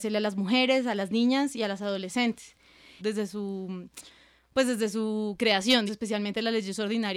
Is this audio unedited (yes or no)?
no